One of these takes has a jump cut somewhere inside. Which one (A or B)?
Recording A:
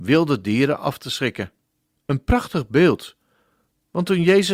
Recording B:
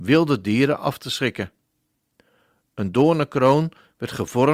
A